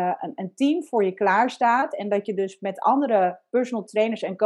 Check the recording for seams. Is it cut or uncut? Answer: uncut